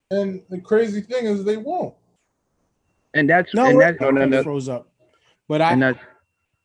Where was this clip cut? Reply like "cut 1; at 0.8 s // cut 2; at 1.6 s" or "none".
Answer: cut 1; at 4.0 s